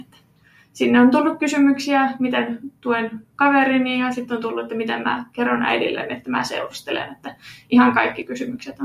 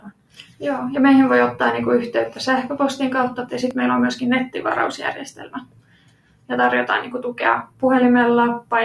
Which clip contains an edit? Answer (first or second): second